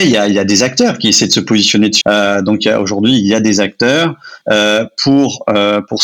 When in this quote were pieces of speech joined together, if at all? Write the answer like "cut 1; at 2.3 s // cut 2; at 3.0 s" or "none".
cut 1; at 2.0 s // cut 2; at 4.4 s